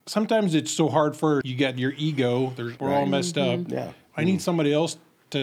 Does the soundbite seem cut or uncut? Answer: cut